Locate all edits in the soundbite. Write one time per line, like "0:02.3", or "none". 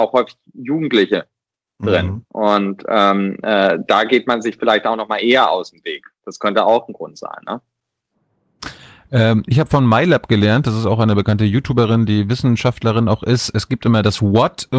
none